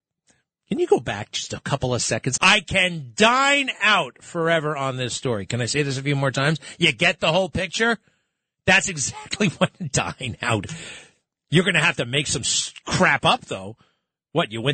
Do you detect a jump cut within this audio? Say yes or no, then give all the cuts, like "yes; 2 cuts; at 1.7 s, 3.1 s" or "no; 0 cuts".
yes; 1 cut; at 2.4 s